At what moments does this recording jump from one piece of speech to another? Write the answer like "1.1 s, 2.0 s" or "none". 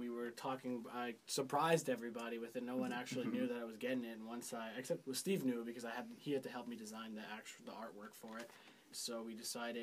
8.9 s